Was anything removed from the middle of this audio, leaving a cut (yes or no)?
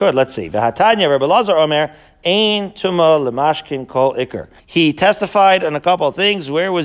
yes